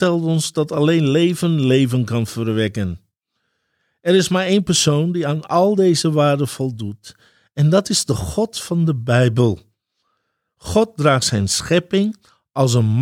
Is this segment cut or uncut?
uncut